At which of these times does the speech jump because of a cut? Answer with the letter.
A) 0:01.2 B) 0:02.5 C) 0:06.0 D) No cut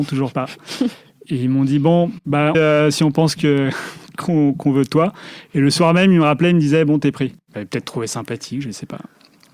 B